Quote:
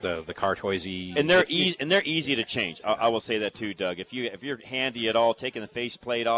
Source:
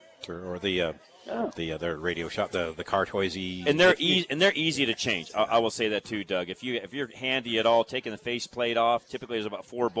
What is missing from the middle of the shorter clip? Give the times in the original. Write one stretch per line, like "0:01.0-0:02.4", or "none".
none